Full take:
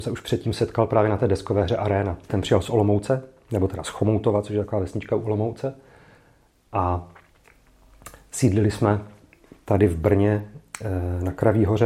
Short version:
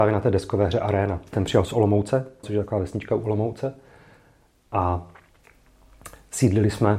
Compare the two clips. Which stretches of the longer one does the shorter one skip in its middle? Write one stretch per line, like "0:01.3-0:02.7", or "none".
0:03.4-0:04.4